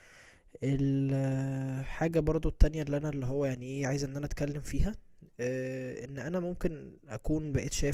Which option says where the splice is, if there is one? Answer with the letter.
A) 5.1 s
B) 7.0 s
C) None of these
B